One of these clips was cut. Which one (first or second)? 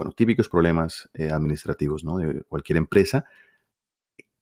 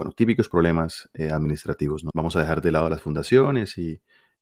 second